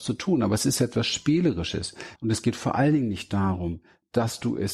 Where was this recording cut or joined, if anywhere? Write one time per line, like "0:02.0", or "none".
0:02.2